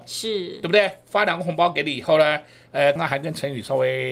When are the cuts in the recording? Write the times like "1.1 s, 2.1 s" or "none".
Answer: 3.0 s